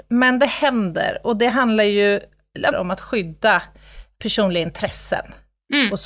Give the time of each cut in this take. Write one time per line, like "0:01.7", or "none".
0:02.7